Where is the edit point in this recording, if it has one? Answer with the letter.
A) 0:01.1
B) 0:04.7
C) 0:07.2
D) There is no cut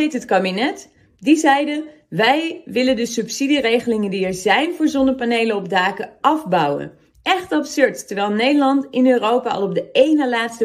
D